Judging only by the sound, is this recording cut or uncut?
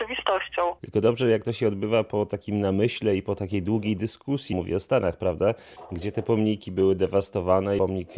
cut